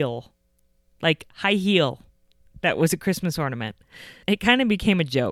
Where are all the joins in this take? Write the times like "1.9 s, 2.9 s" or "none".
4.2 s